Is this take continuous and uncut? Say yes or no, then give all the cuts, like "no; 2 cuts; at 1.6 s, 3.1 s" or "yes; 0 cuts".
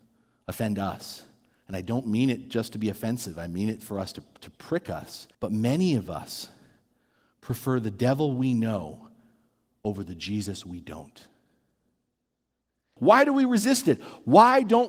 no; 2 cuts; at 5.3 s, 13.0 s